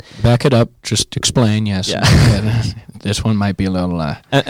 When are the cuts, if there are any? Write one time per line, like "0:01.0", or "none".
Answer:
0:02.9